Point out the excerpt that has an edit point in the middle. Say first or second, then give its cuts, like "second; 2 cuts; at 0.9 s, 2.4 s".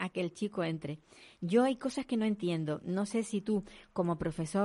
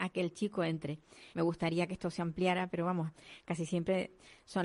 second; 1 cut; at 1.3 s